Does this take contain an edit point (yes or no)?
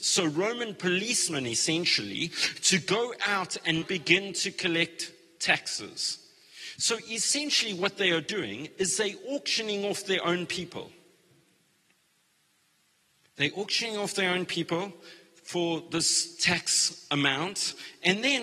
yes